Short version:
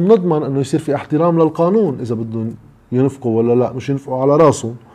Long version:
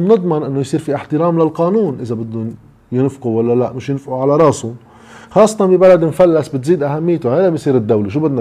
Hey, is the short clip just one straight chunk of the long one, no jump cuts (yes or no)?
yes